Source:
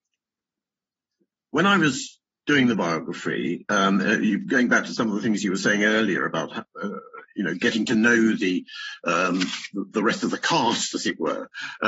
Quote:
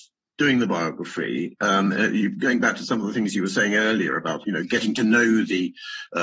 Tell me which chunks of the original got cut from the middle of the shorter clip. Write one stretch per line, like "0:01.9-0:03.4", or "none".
0:06.5-0:07.3